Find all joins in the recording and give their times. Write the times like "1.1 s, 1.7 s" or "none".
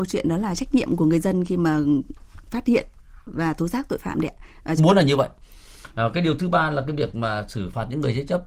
4.8 s